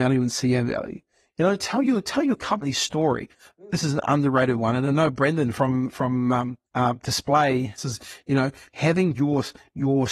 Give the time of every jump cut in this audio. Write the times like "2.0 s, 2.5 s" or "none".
6.7 s, 7.8 s